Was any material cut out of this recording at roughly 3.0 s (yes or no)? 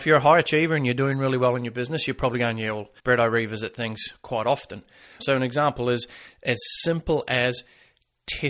yes